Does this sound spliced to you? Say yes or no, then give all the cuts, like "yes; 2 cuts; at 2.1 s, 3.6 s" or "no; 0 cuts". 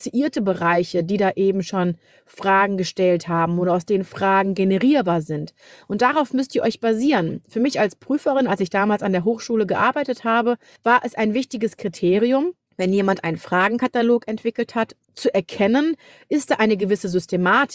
no; 0 cuts